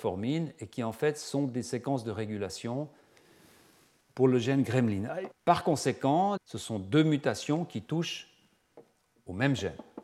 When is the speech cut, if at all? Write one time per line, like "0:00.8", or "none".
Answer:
0:05.3
0:06.4